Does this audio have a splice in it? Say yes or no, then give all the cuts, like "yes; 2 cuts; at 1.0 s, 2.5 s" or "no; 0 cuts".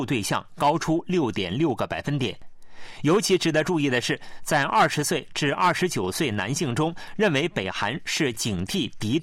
no; 0 cuts